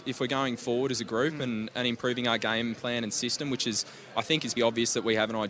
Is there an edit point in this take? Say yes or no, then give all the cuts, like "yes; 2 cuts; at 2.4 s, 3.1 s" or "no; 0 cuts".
yes; 1 cut; at 4.6 s